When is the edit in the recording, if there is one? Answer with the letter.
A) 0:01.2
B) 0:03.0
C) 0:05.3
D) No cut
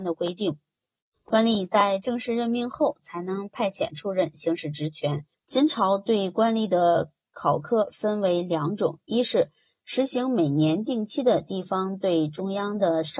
C